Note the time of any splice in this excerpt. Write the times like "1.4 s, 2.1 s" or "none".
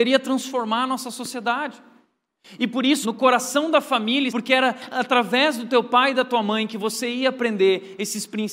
3.0 s, 4.3 s

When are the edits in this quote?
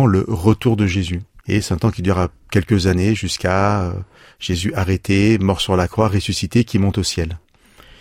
1.4 s

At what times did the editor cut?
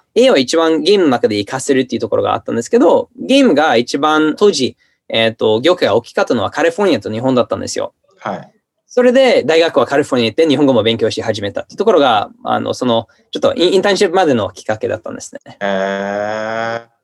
4.4 s

